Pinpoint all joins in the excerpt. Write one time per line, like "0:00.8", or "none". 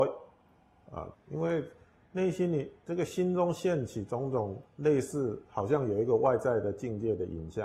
0:01.1